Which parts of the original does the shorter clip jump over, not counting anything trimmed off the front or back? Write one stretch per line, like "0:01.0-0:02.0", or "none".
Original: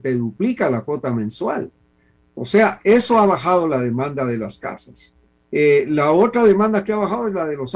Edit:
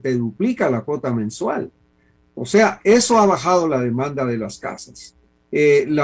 none